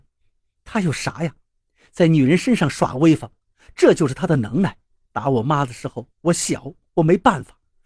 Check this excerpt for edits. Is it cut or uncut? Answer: cut